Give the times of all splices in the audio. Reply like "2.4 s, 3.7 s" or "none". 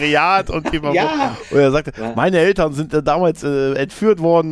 none